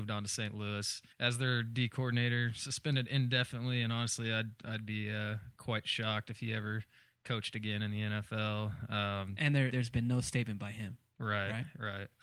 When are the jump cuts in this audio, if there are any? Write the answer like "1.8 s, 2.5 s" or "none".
1.1 s, 9.7 s